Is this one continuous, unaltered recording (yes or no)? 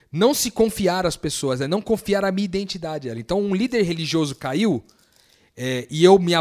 yes